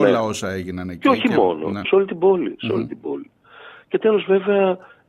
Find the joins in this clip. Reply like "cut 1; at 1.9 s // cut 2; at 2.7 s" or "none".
cut 1; at 1.8 s